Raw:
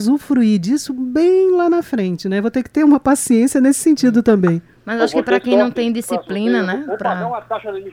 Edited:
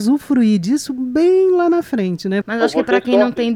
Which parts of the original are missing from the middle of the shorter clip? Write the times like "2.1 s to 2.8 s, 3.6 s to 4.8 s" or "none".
2.4 s to 4.8 s